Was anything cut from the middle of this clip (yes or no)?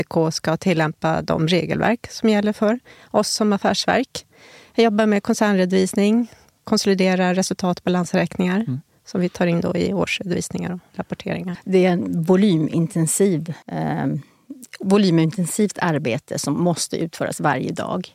yes